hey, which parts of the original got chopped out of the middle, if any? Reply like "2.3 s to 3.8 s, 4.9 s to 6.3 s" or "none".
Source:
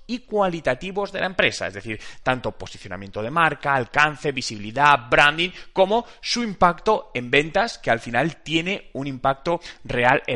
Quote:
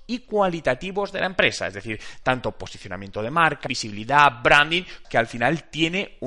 3.7 s to 4.3 s, 5.7 s to 7.8 s